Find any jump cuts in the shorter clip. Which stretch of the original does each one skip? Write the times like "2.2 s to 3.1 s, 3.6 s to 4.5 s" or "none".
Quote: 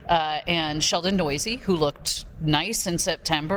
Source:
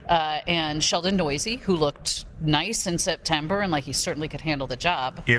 none